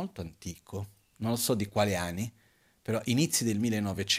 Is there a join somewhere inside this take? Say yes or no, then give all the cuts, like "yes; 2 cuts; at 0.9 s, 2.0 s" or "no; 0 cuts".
no; 0 cuts